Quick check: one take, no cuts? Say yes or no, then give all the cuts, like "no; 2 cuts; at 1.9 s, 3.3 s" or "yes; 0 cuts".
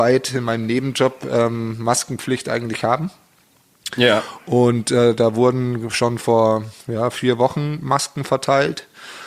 yes; 0 cuts